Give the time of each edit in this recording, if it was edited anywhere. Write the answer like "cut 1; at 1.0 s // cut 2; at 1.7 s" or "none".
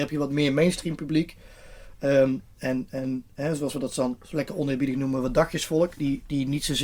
none